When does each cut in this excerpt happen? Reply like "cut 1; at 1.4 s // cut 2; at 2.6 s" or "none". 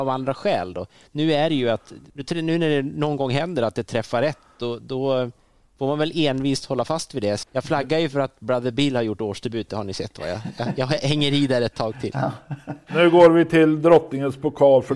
cut 1; at 7.4 s